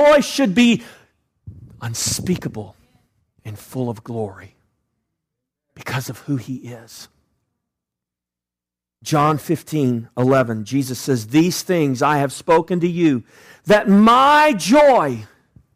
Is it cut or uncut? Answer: uncut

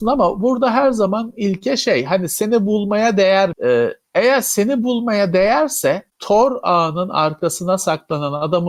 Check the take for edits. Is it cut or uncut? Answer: cut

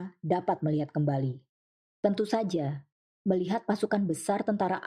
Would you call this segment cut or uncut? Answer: cut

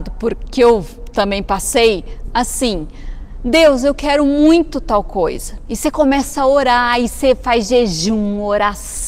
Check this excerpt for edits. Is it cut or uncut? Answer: uncut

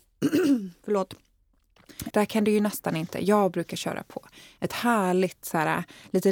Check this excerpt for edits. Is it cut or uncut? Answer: cut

